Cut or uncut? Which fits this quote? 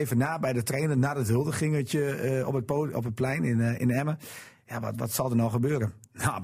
uncut